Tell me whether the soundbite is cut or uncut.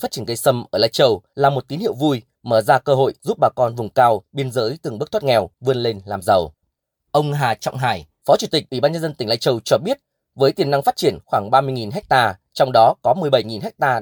uncut